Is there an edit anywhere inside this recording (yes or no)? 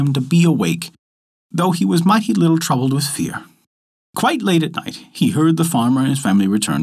yes